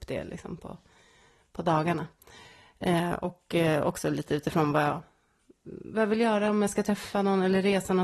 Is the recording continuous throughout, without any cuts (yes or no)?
yes